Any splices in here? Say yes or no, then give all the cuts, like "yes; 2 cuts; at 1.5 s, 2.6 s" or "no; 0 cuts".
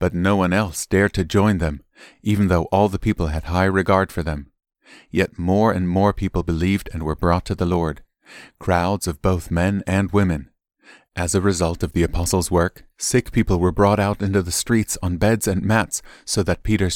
no; 0 cuts